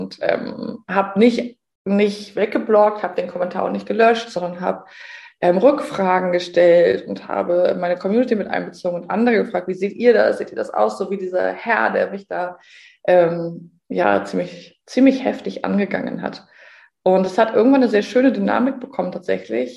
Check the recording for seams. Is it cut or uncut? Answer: uncut